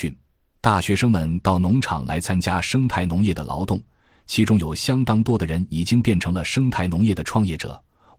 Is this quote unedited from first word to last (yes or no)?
yes